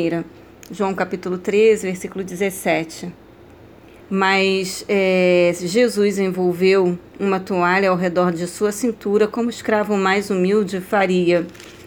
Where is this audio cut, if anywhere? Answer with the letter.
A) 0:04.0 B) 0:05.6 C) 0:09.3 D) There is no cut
A